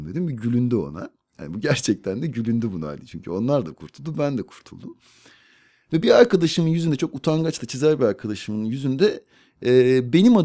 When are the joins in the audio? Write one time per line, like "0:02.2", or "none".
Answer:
none